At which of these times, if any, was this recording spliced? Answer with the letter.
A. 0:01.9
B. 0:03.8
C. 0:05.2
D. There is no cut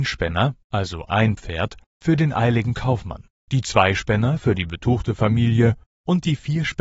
D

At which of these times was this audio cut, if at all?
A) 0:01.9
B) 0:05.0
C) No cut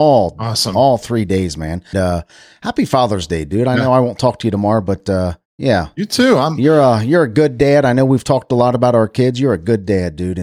A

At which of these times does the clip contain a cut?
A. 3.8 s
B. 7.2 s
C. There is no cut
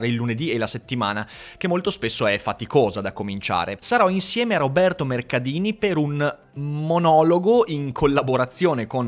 A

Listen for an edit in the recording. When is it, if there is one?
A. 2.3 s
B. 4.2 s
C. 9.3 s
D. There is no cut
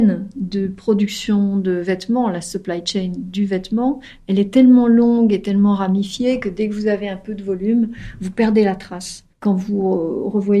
C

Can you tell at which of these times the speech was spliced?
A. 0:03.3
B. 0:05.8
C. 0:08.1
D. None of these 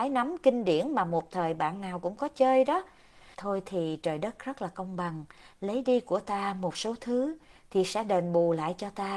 A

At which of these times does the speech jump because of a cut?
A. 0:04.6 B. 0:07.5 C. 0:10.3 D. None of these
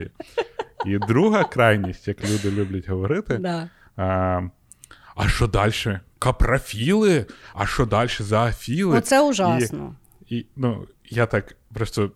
D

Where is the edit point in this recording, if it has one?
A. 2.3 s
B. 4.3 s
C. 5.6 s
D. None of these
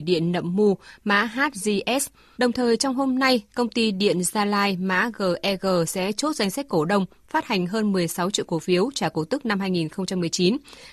A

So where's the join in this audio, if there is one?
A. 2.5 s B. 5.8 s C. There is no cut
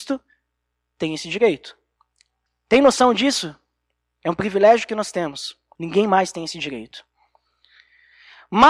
B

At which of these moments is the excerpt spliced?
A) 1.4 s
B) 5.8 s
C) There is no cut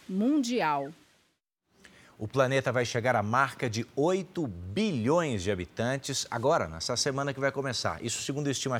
C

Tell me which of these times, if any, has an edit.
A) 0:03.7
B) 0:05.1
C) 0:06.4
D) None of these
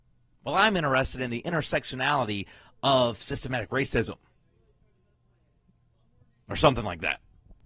D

